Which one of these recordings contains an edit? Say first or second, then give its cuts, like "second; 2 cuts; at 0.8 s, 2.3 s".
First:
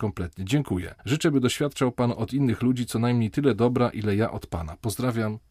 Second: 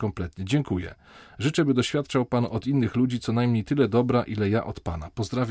first; 1 cut; at 1.0 s